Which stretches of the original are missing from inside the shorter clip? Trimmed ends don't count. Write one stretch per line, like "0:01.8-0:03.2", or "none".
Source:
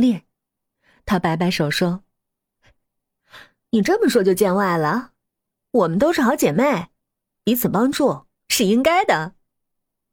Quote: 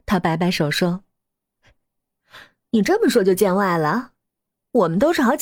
none